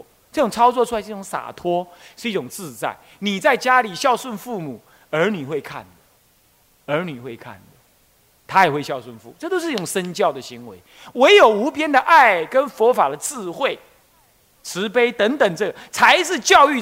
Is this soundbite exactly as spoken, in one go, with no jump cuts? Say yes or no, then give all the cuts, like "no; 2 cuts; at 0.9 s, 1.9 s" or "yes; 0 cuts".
yes; 0 cuts